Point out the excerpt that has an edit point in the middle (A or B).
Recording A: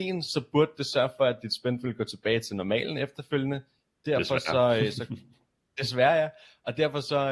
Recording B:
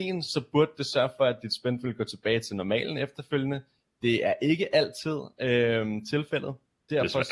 A